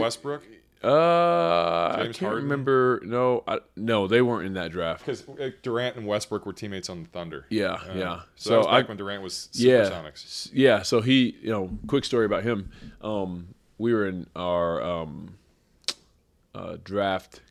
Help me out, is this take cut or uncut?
cut